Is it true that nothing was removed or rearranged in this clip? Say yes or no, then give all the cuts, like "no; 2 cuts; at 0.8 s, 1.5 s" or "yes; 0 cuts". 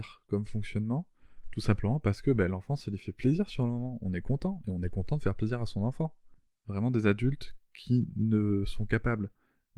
no; 1 cut; at 6.5 s